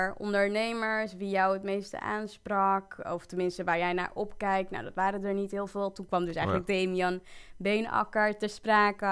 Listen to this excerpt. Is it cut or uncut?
uncut